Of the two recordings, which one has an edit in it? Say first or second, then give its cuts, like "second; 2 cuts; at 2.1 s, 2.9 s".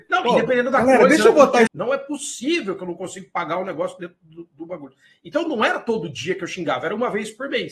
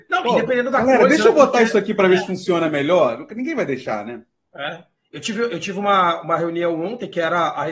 first; 1 cut; at 1.7 s